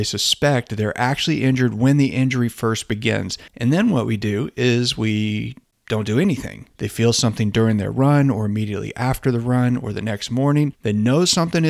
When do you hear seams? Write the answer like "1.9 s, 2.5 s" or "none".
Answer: 3.5 s, 6.7 s